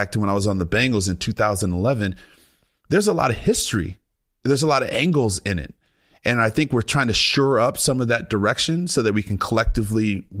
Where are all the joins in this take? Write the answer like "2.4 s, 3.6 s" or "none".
none